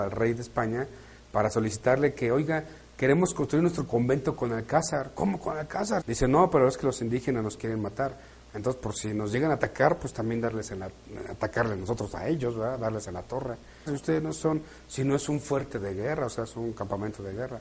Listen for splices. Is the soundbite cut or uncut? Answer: cut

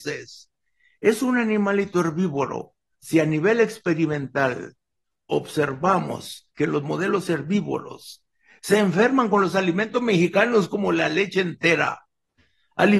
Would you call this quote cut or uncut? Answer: cut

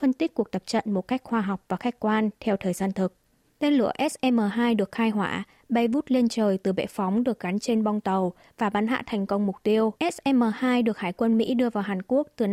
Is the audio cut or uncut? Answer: cut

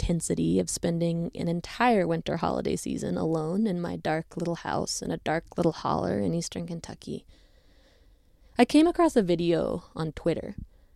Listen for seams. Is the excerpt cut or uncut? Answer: uncut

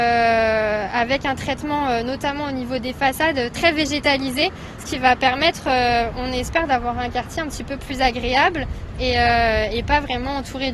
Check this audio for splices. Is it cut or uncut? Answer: uncut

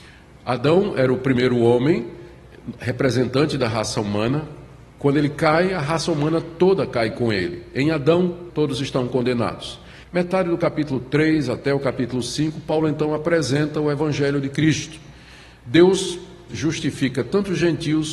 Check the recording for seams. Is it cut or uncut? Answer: cut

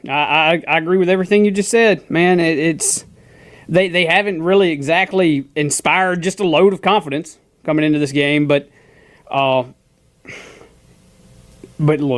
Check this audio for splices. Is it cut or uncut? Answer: uncut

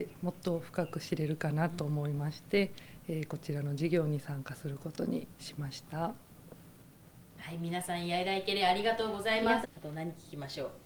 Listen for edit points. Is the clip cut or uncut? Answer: cut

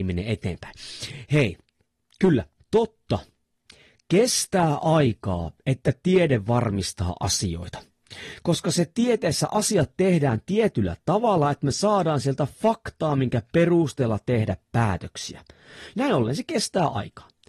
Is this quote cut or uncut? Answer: uncut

